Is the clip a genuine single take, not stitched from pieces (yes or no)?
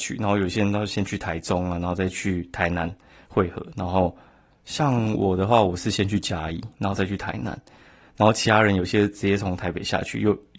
yes